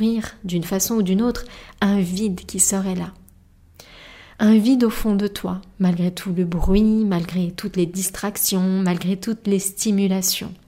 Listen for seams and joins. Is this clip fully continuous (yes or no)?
yes